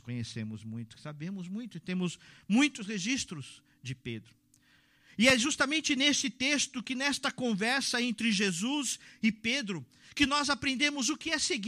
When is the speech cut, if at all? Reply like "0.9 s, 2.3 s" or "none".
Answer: none